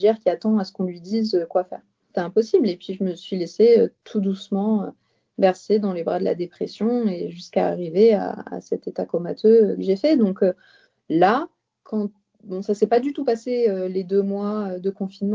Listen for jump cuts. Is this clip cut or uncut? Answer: uncut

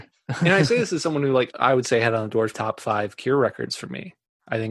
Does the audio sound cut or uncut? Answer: cut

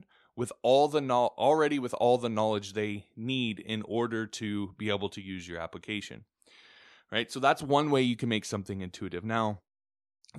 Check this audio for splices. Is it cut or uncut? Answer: uncut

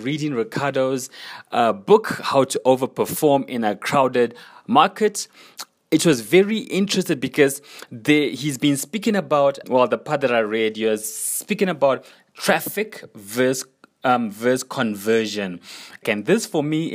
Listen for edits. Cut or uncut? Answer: cut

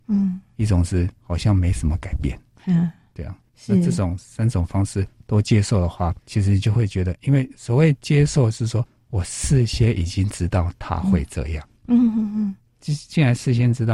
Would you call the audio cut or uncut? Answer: cut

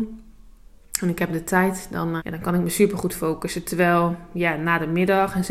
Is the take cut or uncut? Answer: cut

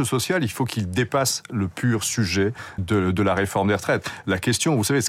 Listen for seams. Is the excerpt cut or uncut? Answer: cut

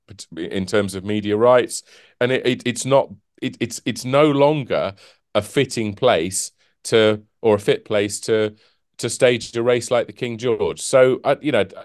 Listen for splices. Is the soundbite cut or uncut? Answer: uncut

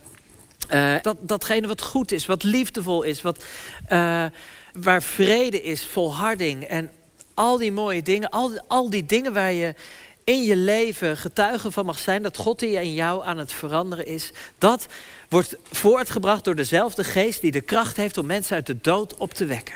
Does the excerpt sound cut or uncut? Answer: cut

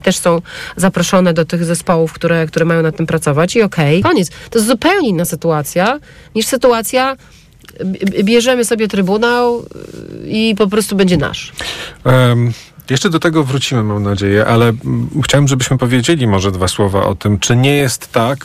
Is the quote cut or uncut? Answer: cut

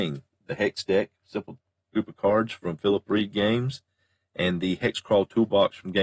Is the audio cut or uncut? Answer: uncut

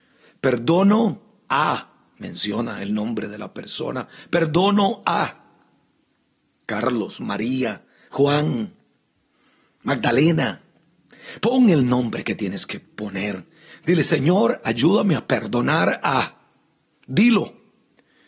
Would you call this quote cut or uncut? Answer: uncut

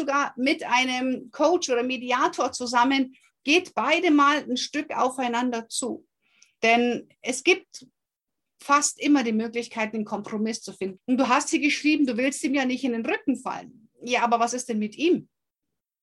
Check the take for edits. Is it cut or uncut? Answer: cut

